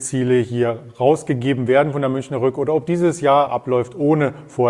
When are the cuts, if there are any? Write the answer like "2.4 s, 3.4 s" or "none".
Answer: 3.5 s